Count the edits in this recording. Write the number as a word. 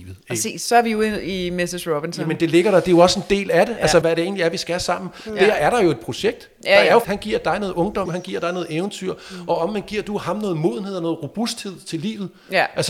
three